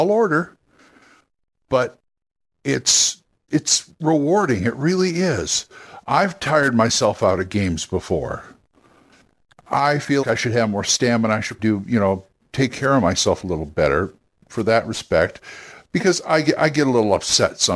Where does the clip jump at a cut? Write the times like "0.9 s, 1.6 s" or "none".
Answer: 3.5 s, 10.2 s, 11.6 s